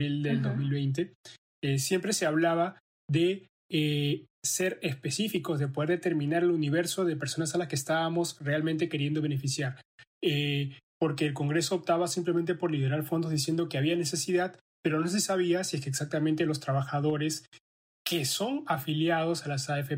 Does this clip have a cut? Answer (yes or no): no